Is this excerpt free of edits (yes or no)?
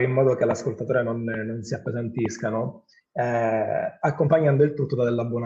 yes